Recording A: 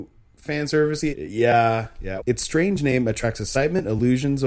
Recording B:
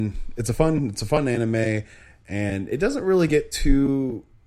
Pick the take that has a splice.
A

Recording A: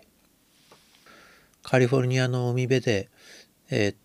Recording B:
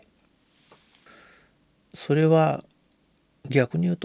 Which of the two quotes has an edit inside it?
A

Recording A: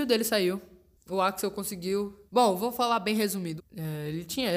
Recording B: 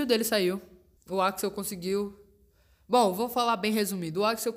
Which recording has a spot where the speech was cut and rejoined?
A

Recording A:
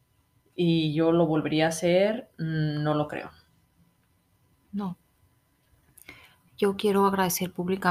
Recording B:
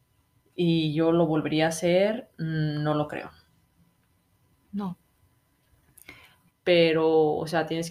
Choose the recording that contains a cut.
B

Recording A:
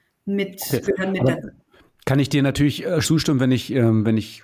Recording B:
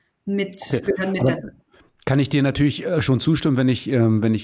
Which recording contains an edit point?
A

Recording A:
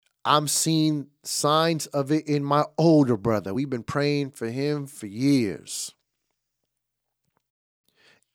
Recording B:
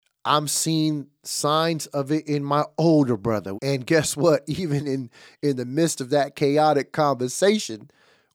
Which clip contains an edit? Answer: B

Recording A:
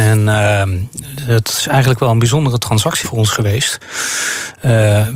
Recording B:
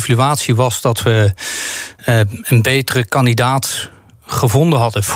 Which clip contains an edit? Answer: A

